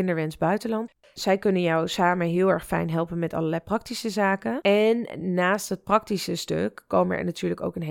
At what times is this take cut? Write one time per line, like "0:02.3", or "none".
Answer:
none

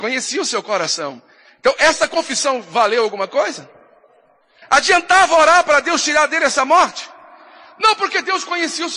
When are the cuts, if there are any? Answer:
0:04.6

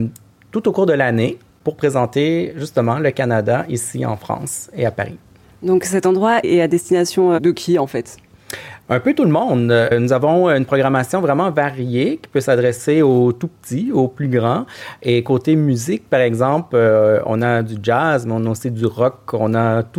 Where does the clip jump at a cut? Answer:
none

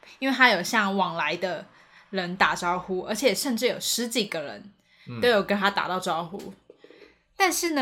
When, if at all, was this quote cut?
none

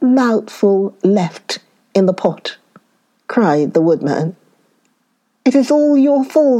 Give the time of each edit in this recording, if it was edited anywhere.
0:03.1

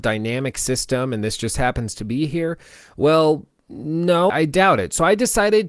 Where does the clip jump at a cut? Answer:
0:04.3

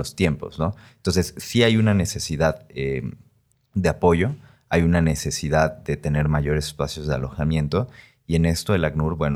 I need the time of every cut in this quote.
none

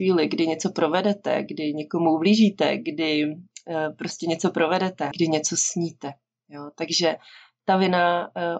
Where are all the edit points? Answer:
0:01.5
0:05.1

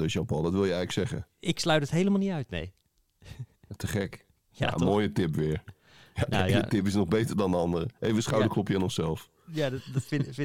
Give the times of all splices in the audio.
none

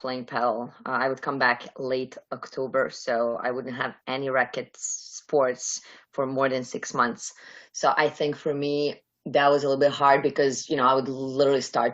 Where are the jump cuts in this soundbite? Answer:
none

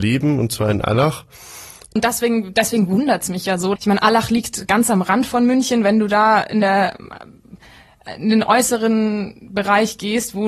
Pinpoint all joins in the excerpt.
0:02.0
0:03.8

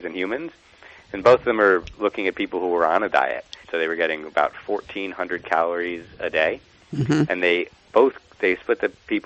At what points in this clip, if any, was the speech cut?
0:03.6

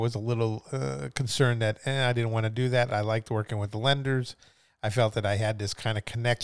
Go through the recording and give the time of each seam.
none

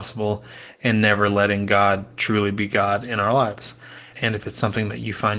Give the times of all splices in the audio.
0:04.1

